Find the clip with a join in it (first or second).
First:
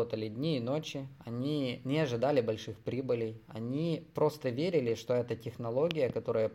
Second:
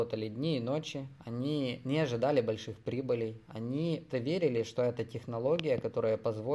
second